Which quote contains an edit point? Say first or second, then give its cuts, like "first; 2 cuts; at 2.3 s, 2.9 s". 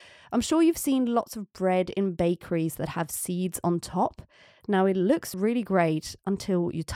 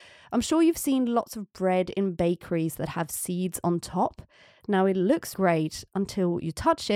second; 1 cut; at 5.3 s